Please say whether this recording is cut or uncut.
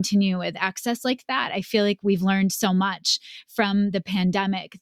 uncut